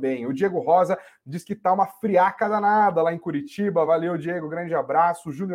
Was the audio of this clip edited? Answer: no; 0 cuts

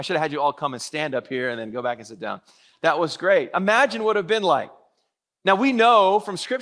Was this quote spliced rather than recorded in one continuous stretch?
no; 0 cuts

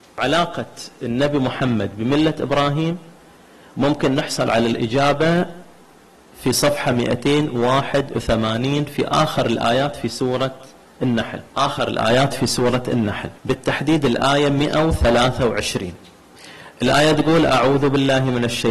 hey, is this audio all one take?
no; 2 cuts; at 11.5 s, 13.4 s

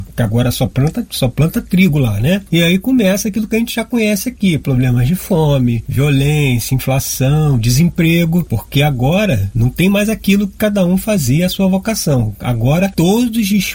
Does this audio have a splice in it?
yes; 1 cut; at 2.5 s

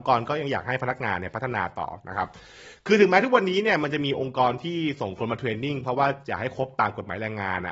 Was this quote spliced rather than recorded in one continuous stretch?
no; 0 cuts

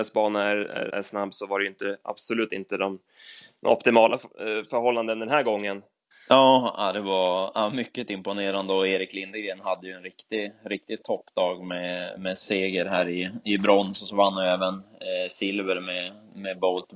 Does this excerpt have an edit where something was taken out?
yes; 2 cuts; at 0.9 s, 6.1 s

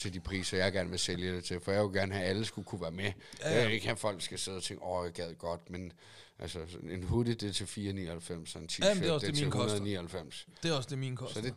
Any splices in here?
no; 0 cuts

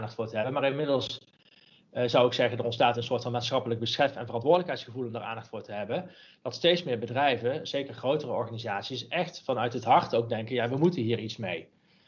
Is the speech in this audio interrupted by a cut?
no; 0 cuts

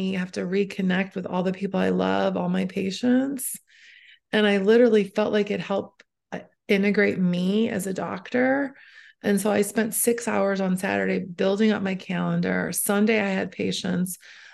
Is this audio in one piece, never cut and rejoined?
yes; 0 cuts

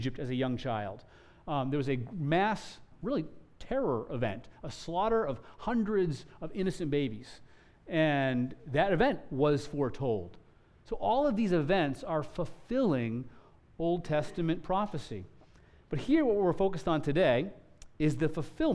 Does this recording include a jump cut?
yes; 1 cut; at 2.9 s

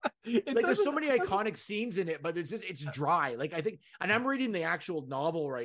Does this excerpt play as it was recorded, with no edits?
yes; 0 cuts

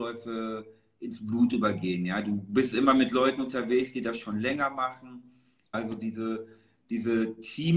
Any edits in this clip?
yes; 1 cut; at 5.7 s

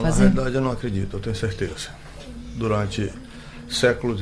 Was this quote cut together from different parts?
no; 0 cuts

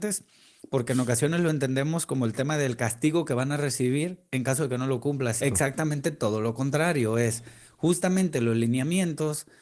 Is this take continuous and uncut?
no; 1 cut; at 5.4 s

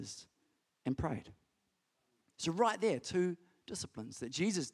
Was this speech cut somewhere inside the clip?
no; 0 cuts

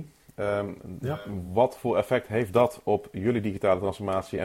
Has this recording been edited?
no; 0 cuts

